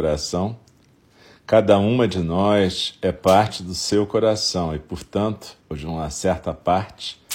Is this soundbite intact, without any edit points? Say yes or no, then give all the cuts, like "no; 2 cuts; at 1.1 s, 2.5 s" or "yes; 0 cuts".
no; 1 cut; at 5.6 s